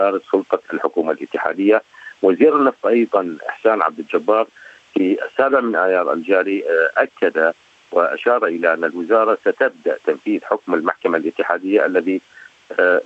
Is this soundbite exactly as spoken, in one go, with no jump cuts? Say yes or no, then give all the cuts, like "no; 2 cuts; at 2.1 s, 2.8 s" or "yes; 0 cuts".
yes; 0 cuts